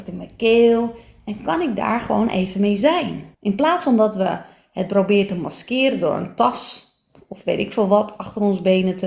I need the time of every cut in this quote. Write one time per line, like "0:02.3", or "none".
0:03.3